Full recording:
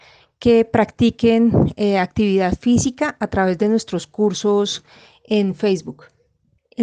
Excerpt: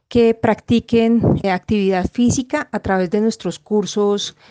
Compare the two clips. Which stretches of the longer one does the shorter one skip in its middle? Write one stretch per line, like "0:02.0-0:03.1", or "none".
0:01.7-0:01.9